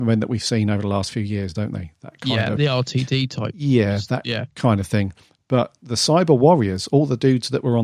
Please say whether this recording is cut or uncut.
cut